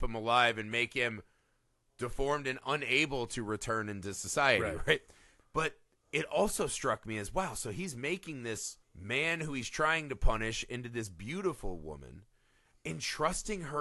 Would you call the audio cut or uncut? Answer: cut